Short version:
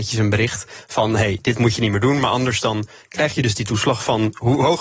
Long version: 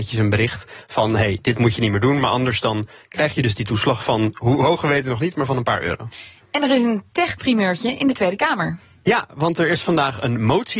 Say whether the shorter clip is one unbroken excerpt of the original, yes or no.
yes